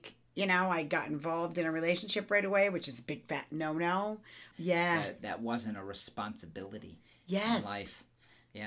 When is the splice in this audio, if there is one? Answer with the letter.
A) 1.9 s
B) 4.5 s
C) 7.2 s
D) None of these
B